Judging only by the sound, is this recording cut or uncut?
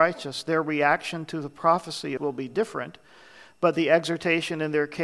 cut